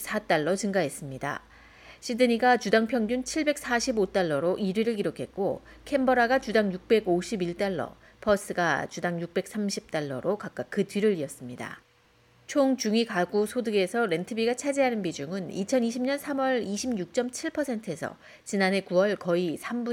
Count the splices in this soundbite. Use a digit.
0